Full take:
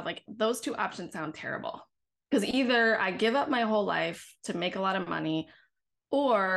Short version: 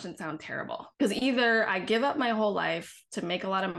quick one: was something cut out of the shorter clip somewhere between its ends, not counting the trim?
yes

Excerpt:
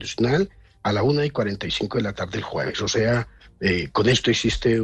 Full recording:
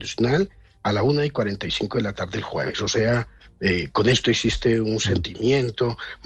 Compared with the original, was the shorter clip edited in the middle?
no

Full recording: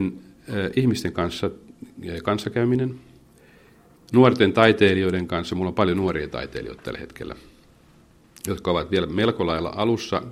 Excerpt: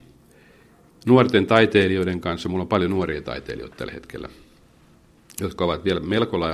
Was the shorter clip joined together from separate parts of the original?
no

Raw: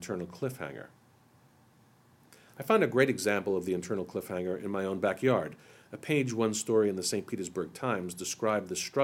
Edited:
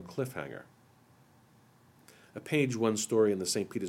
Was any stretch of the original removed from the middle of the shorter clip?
yes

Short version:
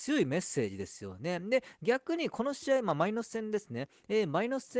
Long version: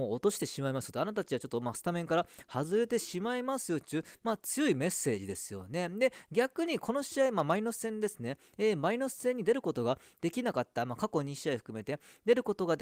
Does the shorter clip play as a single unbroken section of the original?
yes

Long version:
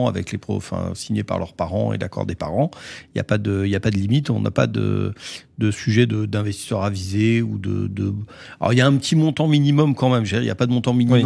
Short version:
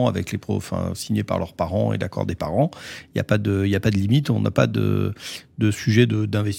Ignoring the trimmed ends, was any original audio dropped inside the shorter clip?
no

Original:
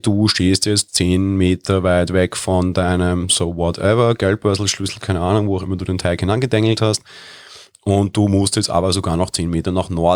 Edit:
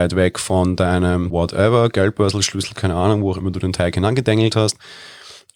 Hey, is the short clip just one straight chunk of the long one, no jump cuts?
no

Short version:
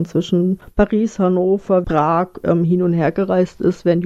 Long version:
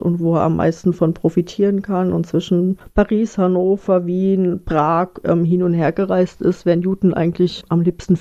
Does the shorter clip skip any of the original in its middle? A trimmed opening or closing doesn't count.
yes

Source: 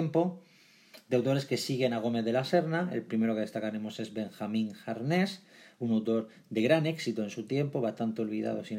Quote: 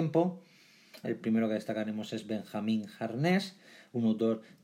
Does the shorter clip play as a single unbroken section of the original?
no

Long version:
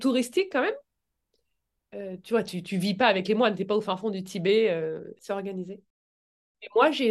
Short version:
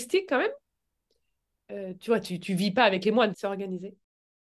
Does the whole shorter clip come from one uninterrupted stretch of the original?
no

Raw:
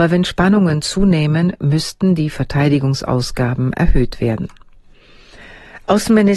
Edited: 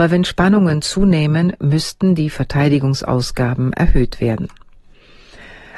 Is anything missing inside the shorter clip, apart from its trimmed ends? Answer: no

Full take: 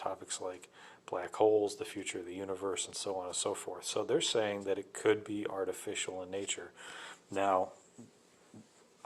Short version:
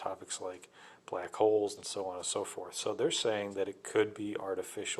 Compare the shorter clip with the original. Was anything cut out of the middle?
yes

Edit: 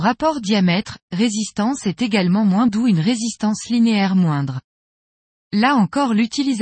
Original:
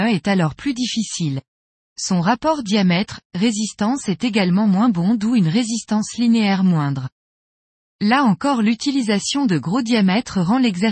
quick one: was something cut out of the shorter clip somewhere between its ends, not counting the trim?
yes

